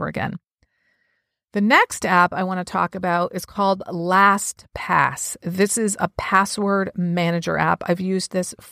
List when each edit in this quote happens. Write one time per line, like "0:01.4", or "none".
none